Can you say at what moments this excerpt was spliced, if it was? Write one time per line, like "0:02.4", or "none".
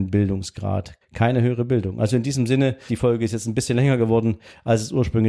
0:01.0
0:02.9